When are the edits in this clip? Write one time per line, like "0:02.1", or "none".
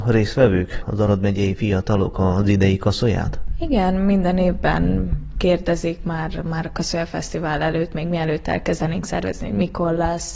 none

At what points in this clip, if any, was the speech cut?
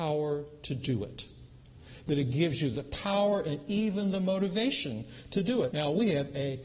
0:05.7

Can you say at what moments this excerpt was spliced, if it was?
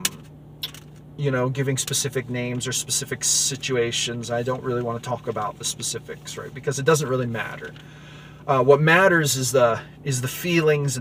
none

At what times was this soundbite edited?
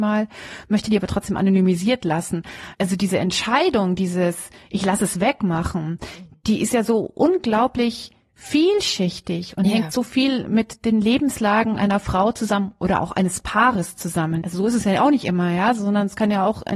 0:14.4

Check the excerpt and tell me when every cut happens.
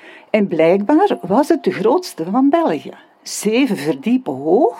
none

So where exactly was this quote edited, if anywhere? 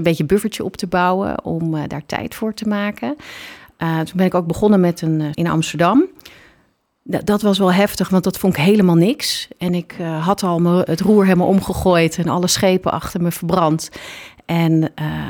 0:05.3

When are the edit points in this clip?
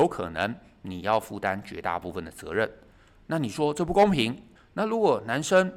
0:04.6

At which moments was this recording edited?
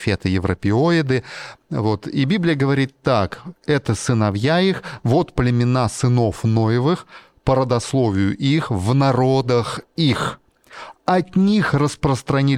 none

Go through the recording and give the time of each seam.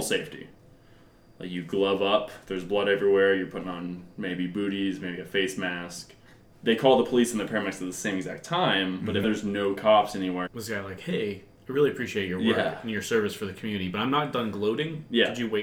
0:06.5
0:09.2
0:10.5

